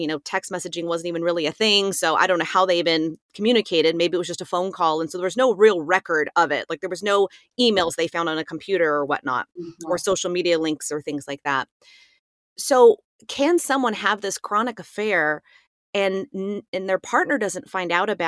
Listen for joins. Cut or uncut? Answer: uncut